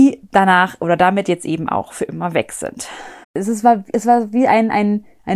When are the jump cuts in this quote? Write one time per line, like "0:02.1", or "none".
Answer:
0:03.2